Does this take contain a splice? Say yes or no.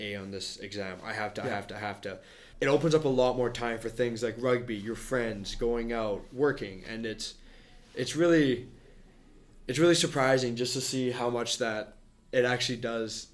yes